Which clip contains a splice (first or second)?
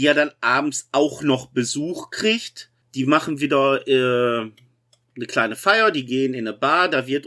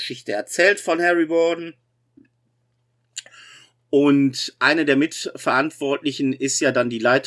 first